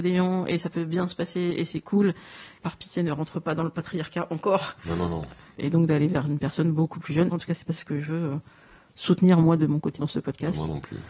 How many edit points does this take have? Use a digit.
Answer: 2